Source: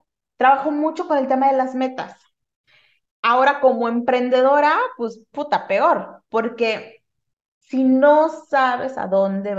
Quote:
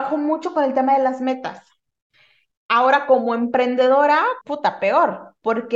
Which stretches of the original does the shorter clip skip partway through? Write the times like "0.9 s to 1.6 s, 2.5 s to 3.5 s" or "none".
4.9 s to 5.3 s